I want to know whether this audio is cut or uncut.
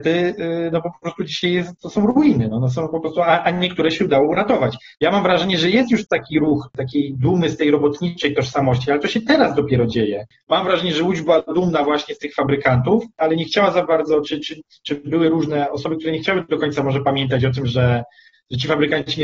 cut